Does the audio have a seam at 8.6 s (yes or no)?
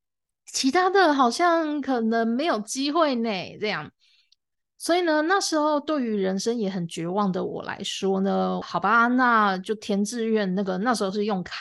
yes